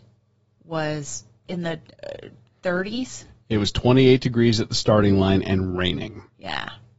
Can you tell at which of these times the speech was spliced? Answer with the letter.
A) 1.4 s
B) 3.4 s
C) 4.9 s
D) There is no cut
A